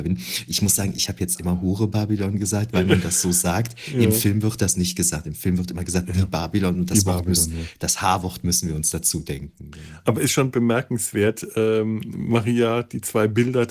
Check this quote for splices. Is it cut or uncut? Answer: uncut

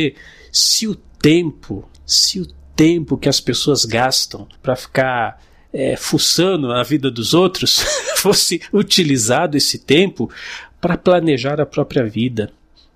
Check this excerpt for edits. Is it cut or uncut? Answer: cut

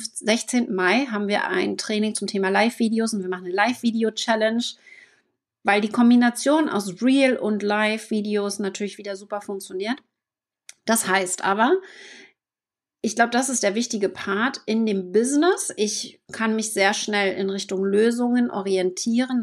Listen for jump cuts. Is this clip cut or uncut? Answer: uncut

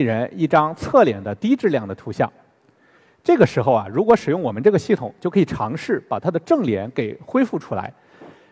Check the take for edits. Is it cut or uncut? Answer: uncut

